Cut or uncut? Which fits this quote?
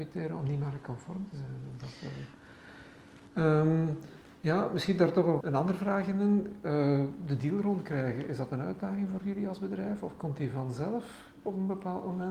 cut